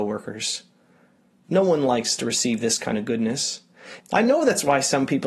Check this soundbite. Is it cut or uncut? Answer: cut